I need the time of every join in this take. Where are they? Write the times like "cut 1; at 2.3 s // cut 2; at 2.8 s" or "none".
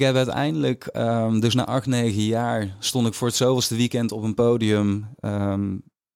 none

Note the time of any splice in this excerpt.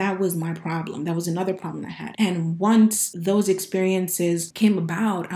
cut 1; at 2.1 s

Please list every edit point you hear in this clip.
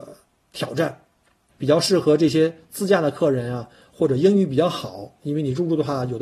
cut 1; at 1.5 s

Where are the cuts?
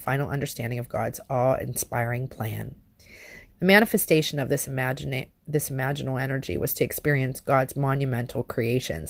cut 1; at 3.5 s

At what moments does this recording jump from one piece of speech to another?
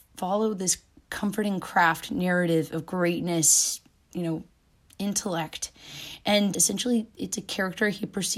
cut 1; at 6.5 s

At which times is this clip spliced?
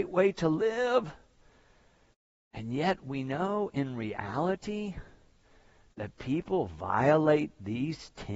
none

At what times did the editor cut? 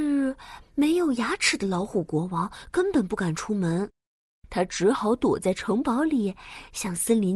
none

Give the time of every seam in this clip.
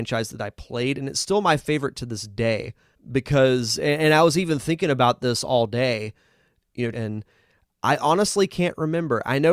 cut 1; at 2.9 s // cut 2; at 6.9 s

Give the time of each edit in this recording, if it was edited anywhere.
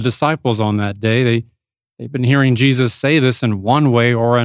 none

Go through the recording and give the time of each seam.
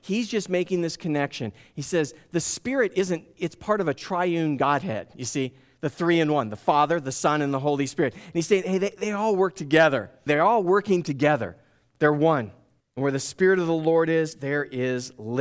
cut 1; at 10.3 s // cut 2; at 12.8 s

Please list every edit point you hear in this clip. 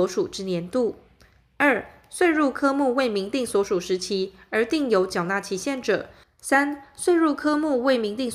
cut 1; at 6.2 s

